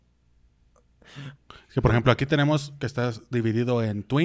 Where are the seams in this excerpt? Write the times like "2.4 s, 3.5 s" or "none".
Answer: 1.3 s